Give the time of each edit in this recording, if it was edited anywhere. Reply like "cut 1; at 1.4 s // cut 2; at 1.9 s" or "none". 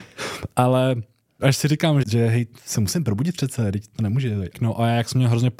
cut 1; at 2.0 s // cut 2; at 4.5 s